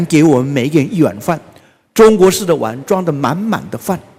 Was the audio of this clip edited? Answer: no; 0 cuts

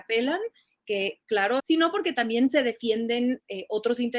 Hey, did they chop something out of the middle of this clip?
yes; 1 cut; at 1.6 s

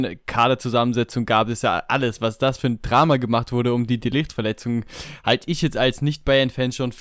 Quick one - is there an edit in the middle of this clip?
no; 0 cuts

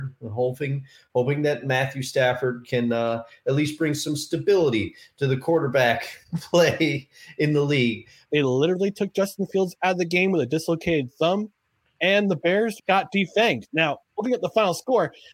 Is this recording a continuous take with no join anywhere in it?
no; 3 cuts; at 8.2 s, 12.8 s, 14.1 s

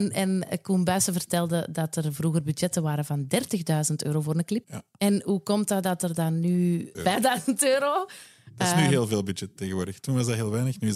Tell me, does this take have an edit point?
yes; 2 cuts; at 4.6 s, 6.9 s

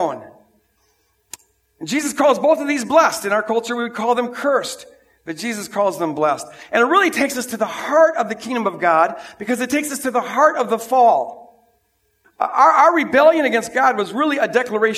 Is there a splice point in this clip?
yes; 1 cut; at 12.2 s

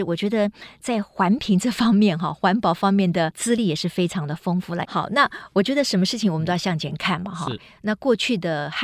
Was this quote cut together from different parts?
yes; 1 cut; at 4.8 s

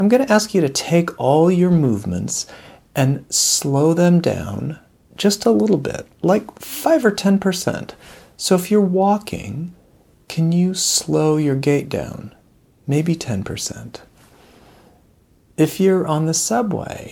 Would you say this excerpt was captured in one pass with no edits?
yes; 0 cuts

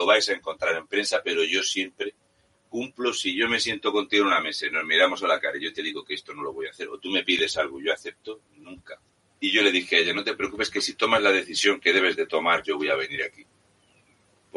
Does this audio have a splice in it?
yes; 2 cuts; at 9.3 s, 12.6 s

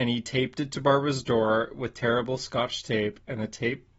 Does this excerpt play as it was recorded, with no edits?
yes; 0 cuts

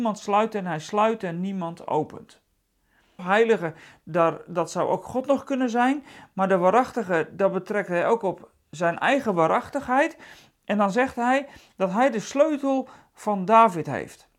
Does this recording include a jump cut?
yes; 1 cut; at 3.2 s

